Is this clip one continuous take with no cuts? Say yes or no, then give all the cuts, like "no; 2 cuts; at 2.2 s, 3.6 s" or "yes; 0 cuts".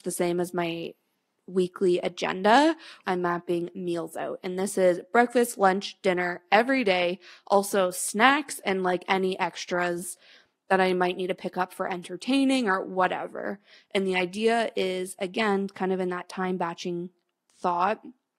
no; 1 cut; at 3.0 s